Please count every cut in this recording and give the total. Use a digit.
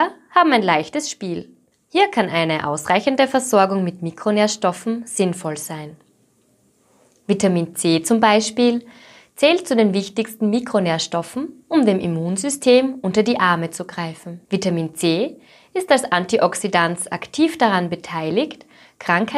1